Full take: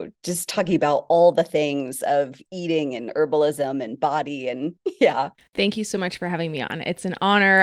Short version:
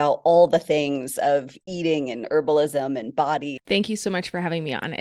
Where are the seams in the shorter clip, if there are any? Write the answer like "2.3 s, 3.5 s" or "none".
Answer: 3.6 s